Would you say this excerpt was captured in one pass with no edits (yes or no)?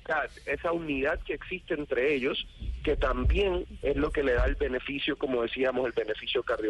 yes